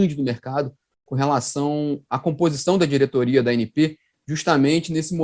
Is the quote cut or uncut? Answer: uncut